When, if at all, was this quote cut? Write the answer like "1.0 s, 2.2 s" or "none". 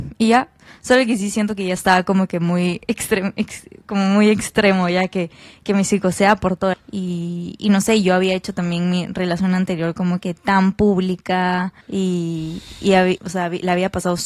6.7 s, 11.8 s, 13.2 s